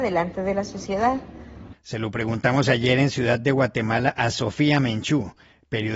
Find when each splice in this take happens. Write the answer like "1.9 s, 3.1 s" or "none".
1.7 s

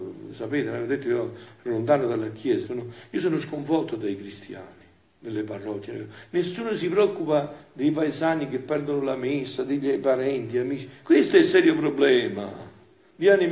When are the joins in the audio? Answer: 2.6 s

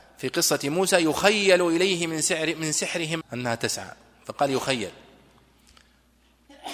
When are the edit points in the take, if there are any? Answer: 3.2 s

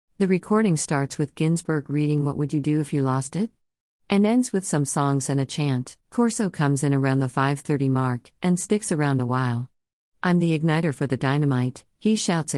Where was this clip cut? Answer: 6.0 s

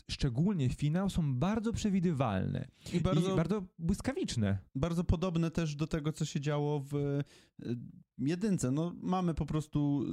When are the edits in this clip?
none

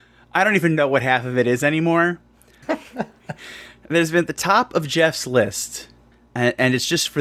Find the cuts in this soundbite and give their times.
2.6 s

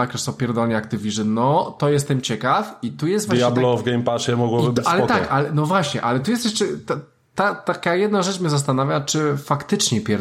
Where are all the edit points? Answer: none

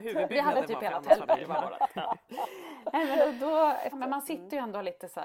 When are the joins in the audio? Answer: 3.9 s

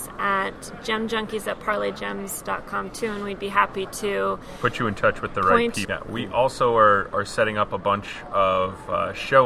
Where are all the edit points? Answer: 5.8 s

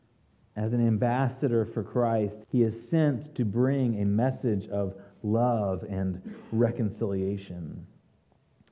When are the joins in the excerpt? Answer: 2.4 s

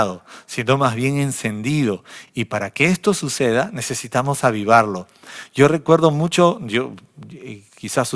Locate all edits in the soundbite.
none

